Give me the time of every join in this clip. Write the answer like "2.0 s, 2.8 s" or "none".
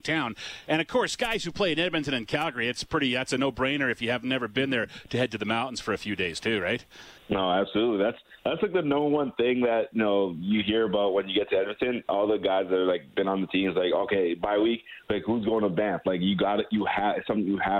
7.2 s